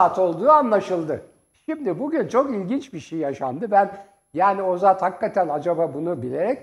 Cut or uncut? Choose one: uncut